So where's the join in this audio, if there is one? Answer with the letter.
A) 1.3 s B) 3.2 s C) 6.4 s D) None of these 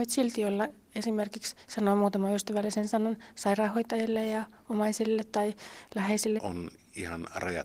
C